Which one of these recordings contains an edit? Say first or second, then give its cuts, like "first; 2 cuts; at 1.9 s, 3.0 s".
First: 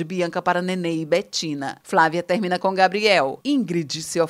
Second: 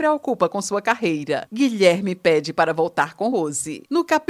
second; 1 cut; at 3.3 s